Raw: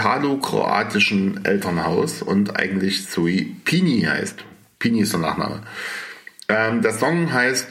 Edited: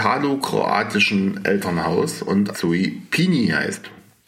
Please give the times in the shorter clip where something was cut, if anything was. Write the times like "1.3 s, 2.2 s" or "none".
2.5 s